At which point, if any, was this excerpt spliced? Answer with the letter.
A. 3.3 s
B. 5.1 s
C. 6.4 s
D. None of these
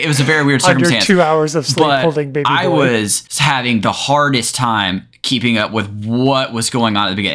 A